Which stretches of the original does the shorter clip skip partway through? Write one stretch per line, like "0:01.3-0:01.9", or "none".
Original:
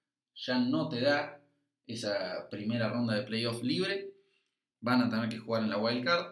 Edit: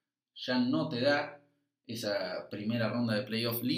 none